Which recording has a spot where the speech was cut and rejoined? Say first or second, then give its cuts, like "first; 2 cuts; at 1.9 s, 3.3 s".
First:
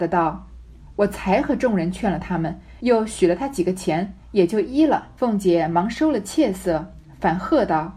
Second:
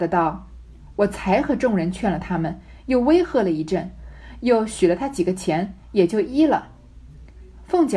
first; 2 cuts; at 2.8 s, 5.2 s